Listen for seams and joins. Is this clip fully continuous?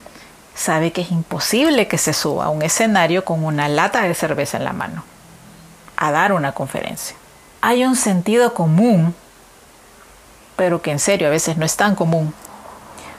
no; 1 cut; at 7.6 s

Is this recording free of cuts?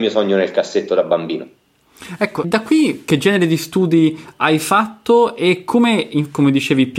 no; 1 cut; at 2.4 s

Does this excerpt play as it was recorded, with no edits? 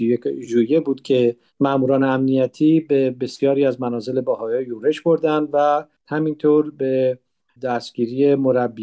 yes; 0 cuts

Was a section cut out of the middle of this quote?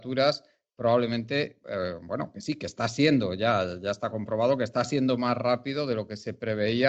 no; 0 cuts

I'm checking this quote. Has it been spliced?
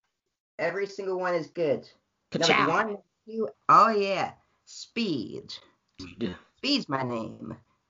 yes; 2 cuts; at 3.5 s, 6.0 s

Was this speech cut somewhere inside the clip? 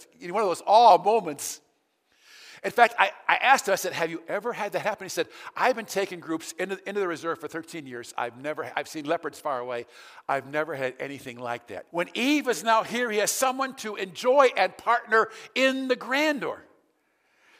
yes; 2 cuts; at 8.7 s, 11.9 s

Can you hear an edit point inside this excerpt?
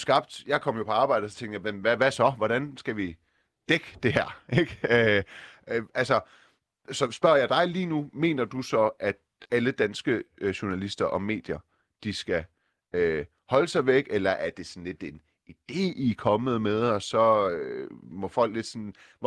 no; 0 cuts

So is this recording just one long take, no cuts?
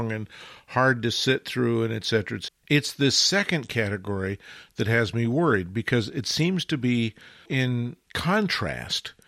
no; 2 cuts; at 2.5 s, 7.5 s

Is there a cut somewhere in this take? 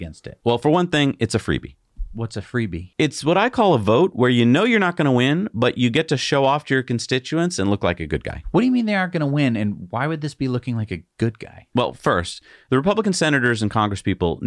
no; 0 cuts

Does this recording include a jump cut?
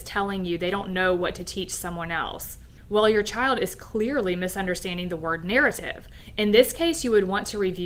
no; 0 cuts

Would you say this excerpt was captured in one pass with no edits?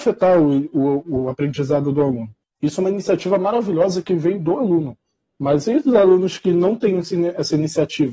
no; 1 cut; at 2.4 s

